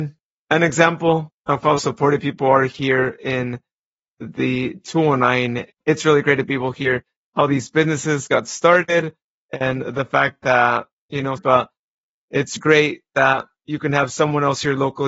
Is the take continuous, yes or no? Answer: no